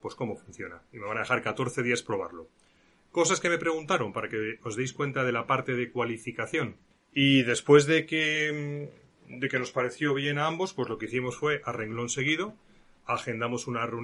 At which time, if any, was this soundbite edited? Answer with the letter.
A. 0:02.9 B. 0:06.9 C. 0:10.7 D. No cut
B